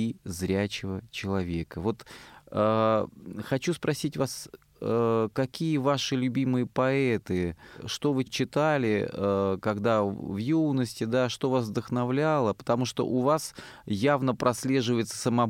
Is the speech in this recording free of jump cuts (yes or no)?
yes